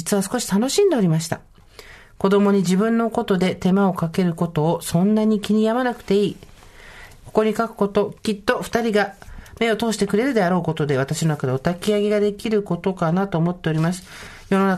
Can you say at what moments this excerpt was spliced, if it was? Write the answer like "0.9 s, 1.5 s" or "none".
7.2 s